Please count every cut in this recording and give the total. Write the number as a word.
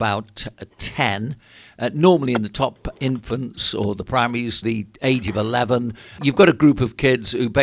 two